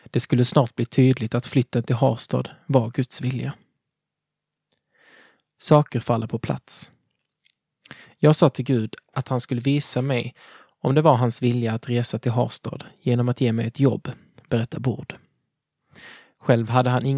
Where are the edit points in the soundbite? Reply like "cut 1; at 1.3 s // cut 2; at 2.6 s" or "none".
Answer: none